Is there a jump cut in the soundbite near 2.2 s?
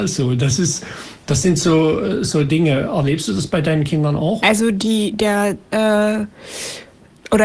no; 2 cuts; at 4.4 s, 5.7 s

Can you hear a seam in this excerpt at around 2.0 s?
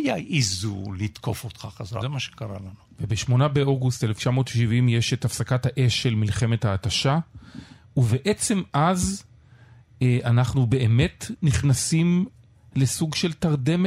yes; 1 cut; at 2.0 s

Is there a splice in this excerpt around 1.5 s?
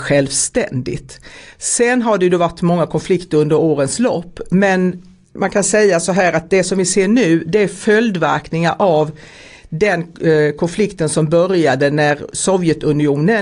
no; 0 cuts

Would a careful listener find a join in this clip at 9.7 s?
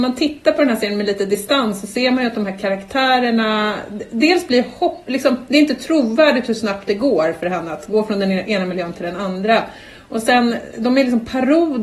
no; 0 cuts

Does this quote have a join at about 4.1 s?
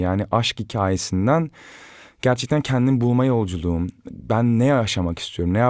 yes; 1 cut; at 4.1 s

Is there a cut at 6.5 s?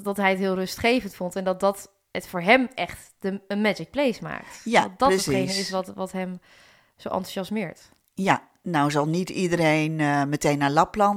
no; 0 cuts

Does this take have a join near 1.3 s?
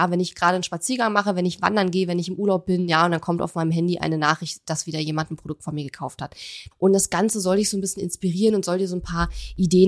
no; 1 cut; at 6.7 s

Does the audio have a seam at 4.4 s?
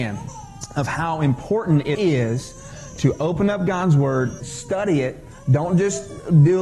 yes; 2 cuts; at 1.9 s, 4.4 s

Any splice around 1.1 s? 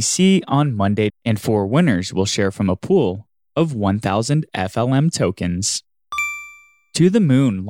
yes; 1 cut; at 1.1 s

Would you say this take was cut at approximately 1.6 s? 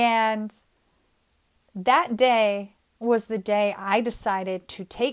no; 0 cuts

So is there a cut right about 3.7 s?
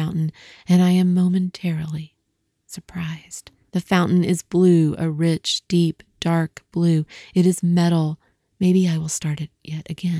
yes; 2 cuts; at 3.7 s, 8.5 s

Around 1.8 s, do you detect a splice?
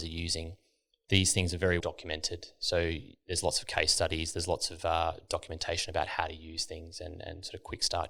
yes; 1 cut; at 1.8 s

